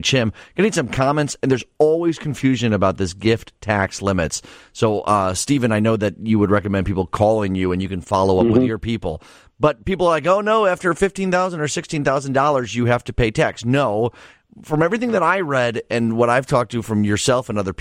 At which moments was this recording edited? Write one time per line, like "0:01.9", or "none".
none